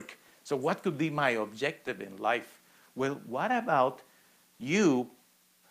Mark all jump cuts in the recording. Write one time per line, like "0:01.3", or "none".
none